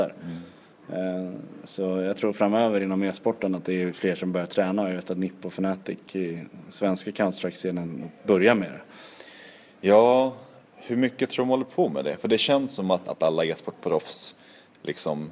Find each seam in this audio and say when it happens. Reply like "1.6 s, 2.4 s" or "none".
13.0 s